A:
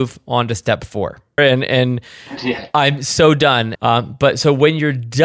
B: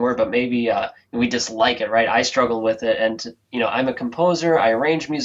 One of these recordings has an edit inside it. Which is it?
A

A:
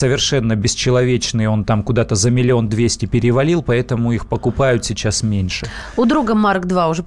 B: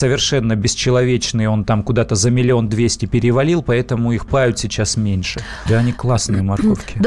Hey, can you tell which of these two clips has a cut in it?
B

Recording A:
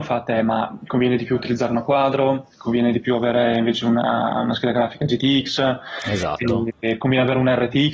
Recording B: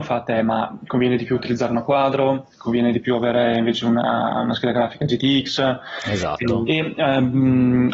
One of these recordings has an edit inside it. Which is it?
B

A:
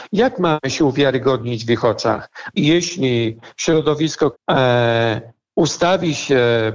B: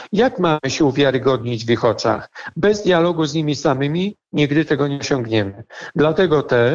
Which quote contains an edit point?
A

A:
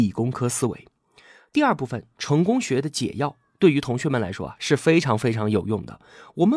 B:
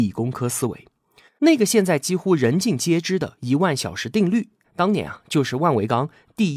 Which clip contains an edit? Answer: B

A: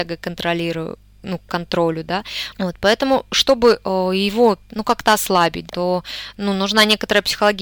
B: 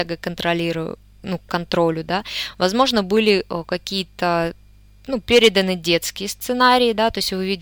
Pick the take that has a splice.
A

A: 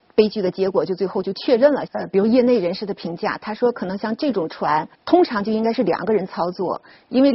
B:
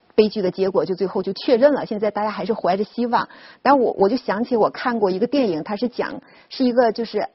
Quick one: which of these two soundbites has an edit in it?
A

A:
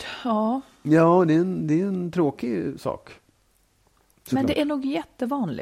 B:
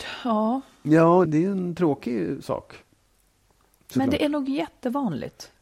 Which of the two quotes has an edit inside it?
B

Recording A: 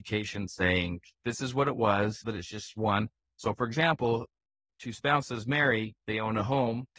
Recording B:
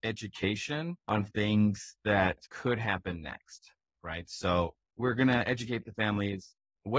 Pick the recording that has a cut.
A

